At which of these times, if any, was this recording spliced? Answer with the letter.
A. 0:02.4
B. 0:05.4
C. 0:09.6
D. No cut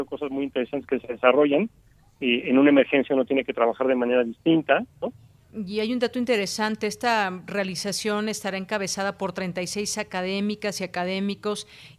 B